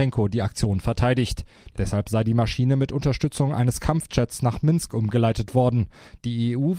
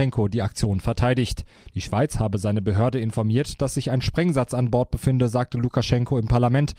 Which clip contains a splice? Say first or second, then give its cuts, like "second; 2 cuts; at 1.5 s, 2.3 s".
first; 1 cut; at 1.7 s